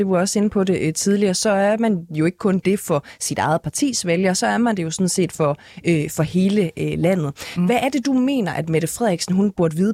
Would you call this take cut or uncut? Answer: uncut